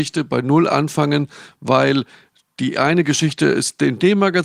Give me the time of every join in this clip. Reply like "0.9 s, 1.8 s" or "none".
none